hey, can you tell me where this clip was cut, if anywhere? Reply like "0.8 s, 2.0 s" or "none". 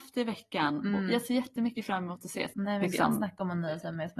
2.5 s

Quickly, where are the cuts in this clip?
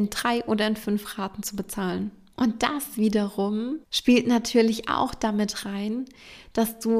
2.3 s, 3.8 s

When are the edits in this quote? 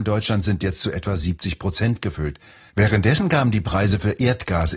2.7 s

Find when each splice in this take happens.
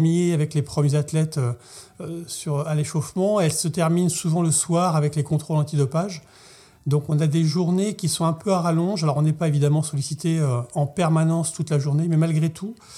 none

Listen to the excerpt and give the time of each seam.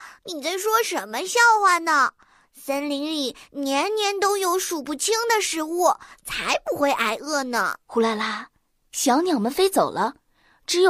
7.8 s

